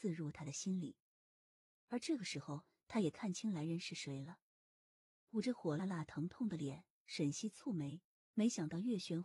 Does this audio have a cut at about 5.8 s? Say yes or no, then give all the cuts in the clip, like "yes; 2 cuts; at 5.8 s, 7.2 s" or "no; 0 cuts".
yes; 1 cut; at 5.8 s